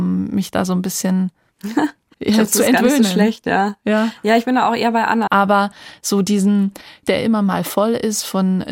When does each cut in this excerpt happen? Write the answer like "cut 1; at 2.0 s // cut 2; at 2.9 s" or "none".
cut 1; at 2.1 s // cut 2; at 5.3 s // cut 3; at 7.0 s